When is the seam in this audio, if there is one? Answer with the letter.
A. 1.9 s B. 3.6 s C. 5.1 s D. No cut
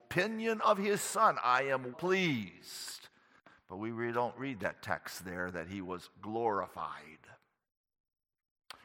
A